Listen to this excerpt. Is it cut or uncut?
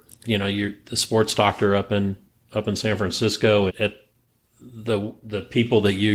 cut